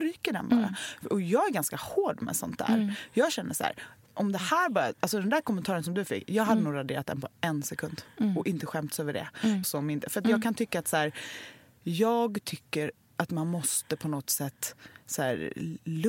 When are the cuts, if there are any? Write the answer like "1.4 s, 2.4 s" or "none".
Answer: 9.6 s